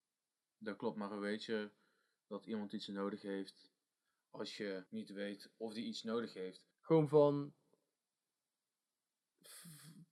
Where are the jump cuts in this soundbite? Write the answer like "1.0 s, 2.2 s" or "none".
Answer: 4.9 s, 6.7 s